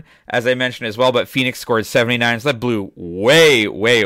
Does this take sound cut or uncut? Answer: uncut